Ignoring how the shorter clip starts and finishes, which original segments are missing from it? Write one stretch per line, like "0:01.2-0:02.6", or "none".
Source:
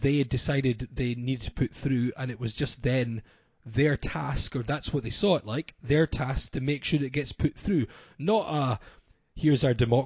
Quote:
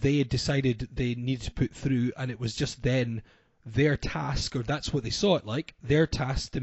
none